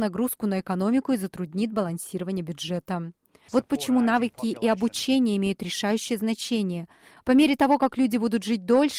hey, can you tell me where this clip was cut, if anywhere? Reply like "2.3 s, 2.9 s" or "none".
3.5 s, 7.2 s